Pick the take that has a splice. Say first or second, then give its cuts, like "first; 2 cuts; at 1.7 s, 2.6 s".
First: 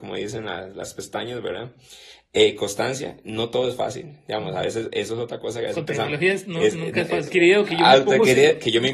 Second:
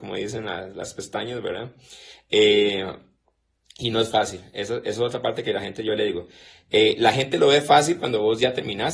first; 2 cuts; at 2.3 s, 7.3 s